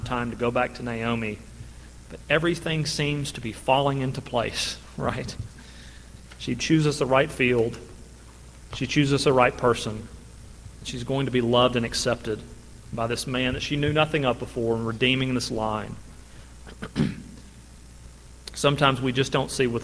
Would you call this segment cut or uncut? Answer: uncut